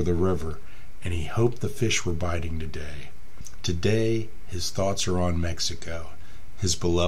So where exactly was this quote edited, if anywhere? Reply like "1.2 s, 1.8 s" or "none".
3.6 s